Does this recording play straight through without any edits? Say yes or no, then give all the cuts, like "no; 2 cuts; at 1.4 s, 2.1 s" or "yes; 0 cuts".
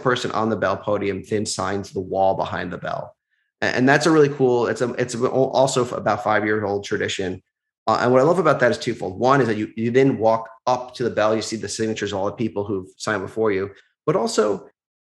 yes; 0 cuts